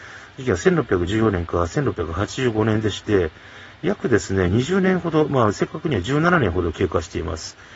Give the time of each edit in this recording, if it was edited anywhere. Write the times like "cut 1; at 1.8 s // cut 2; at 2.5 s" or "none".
none